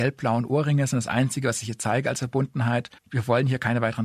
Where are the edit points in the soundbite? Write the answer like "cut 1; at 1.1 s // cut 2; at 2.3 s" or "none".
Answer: cut 1; at 3.0 s